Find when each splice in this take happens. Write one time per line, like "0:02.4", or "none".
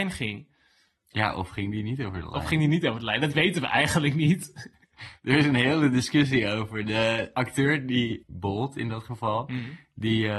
none

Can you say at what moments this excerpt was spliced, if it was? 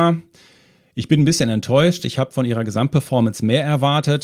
none

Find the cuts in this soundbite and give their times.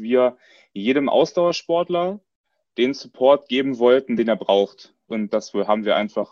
0:05.1

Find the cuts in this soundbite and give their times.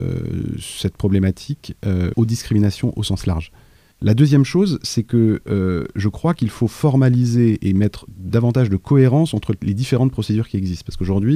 0:02.1
0:03.9

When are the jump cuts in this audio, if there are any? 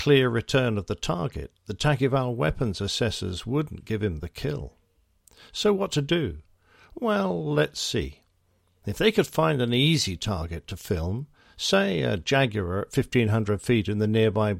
none

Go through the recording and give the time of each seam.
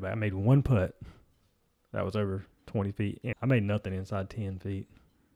0:03.3

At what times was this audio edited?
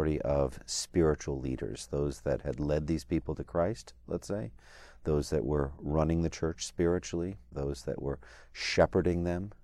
0:07.5

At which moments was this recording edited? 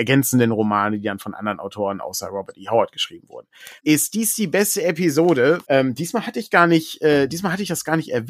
0:03.8
0:05.6

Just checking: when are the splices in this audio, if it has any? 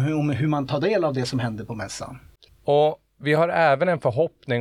0:02.5

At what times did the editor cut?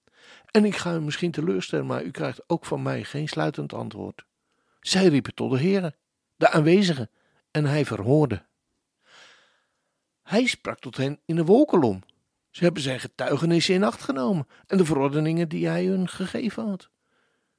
0:04.8

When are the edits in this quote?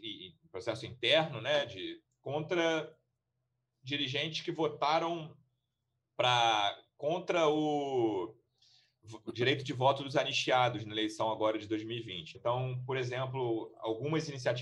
0:12.3

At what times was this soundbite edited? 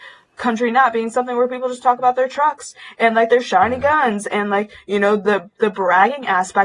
none

